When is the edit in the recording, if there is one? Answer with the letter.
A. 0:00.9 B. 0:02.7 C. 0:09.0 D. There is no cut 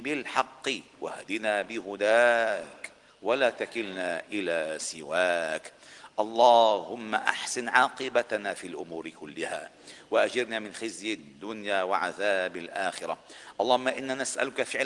A